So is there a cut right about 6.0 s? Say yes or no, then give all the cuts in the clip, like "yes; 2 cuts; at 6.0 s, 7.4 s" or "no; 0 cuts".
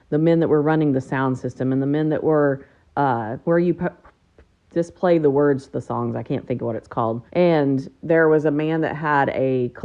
no; 2 cuts; at 3.4 s, 7.3 s